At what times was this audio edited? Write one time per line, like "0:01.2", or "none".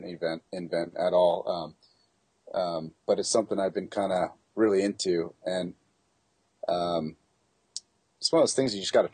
none